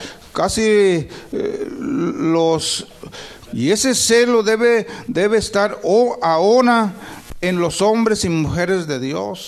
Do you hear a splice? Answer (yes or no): yes